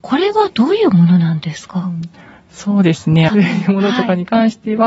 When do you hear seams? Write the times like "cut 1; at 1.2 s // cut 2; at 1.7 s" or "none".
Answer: cut 1; at 3.3 s